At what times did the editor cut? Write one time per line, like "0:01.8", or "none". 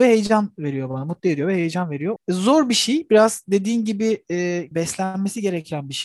0:02.2
0:04.7